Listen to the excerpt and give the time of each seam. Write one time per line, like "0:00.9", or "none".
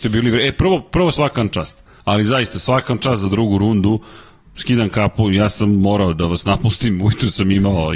0:02.0

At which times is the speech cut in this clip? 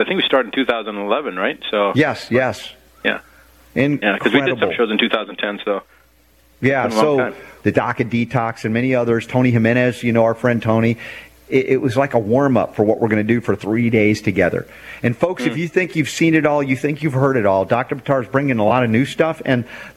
0:07.6
0:11.5

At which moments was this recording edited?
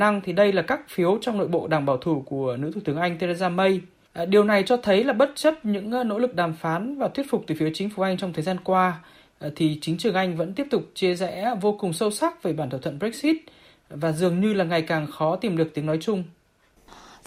0:04.0

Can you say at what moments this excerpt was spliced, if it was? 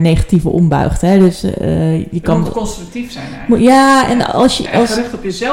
none

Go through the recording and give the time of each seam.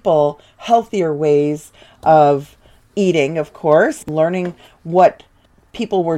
none

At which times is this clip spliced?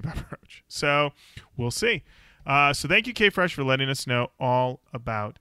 none

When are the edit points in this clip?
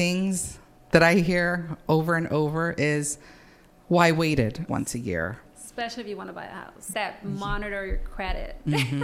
0:04.7
0:06.9

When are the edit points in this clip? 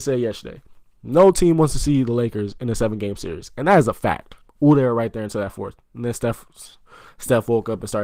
0:04.5

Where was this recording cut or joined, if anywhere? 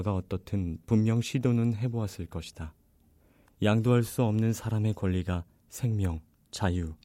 0:03.4

